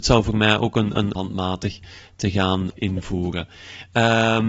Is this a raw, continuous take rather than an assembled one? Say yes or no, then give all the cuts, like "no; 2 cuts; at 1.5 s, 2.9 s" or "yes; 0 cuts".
no; 2 cuts; at 1.2 s, 2.7 s